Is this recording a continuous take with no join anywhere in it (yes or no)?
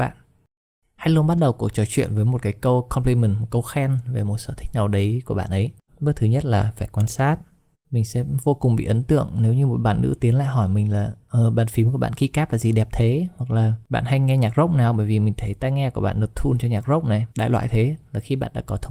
no